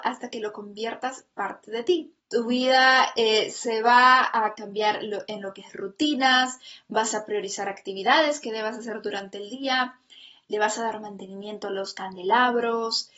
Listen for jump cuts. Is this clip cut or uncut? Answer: cut